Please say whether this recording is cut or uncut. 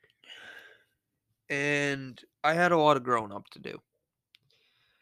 cut